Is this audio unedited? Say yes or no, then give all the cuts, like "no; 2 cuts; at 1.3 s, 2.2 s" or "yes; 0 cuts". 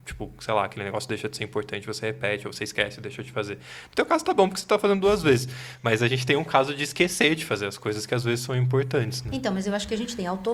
yes; 0 cuts